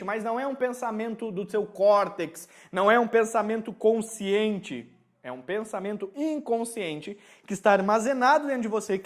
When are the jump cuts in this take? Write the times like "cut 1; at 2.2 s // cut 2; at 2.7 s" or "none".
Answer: none